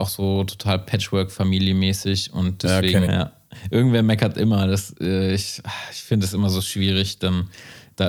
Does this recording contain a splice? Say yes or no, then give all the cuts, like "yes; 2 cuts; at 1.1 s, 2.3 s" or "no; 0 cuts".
yes; 1 cut; at 3.0 s